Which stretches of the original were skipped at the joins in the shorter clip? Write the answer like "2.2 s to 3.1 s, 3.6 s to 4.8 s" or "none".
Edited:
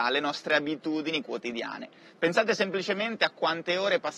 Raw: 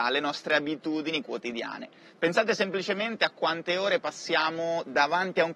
none